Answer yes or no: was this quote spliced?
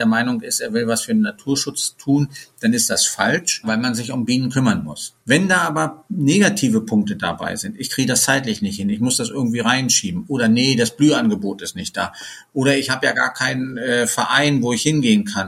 yes